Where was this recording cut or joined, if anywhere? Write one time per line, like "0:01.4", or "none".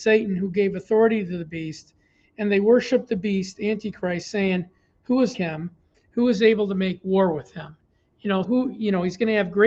0:05.3
0:08.4